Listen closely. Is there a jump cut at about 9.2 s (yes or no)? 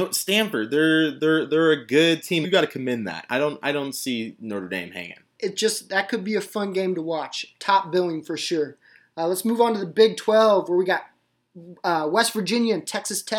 no